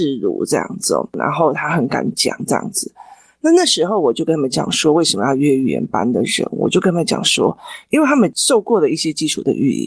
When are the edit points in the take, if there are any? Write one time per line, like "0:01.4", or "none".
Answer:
none